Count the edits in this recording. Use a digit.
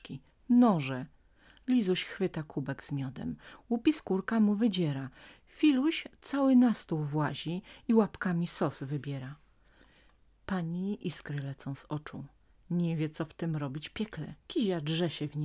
1